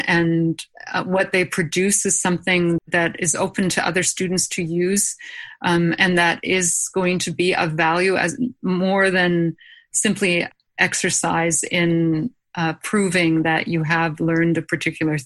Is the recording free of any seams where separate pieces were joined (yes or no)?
no